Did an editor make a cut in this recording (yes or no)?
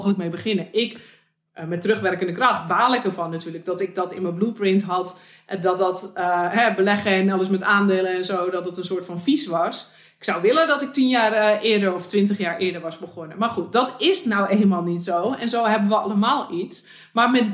no